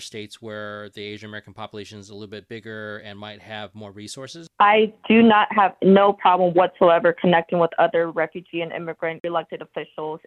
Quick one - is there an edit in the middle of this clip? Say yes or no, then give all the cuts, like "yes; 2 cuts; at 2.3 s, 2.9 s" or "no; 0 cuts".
no; 0 cuts